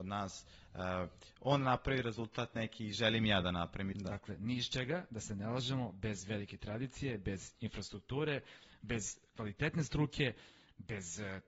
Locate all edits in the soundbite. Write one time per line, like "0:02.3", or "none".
0:03.9